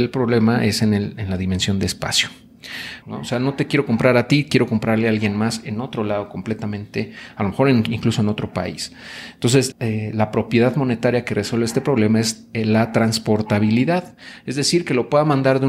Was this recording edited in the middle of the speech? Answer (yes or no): yes